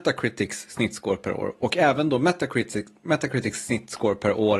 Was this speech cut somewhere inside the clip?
no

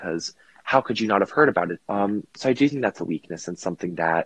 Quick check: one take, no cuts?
no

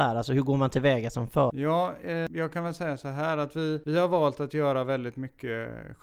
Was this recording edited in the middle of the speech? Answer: yes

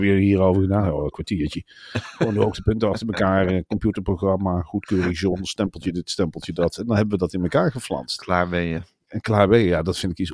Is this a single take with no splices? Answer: yes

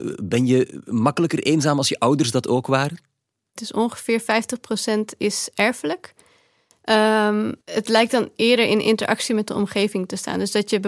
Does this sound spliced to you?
yes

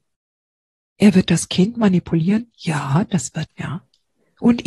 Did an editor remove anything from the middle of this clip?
yes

